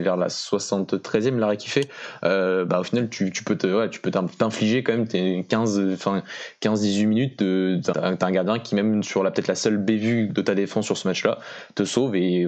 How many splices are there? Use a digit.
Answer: 2